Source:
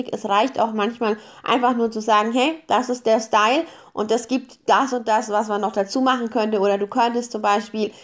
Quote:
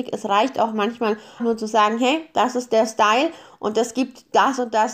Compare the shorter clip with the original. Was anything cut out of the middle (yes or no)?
yes